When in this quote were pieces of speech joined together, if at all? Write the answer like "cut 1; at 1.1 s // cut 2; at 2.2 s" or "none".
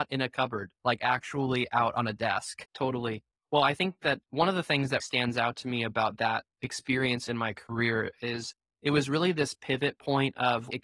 cut 1; at 2.6 s // cut 2; at 5.0 s